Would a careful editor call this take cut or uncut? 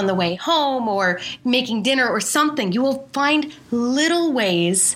uncut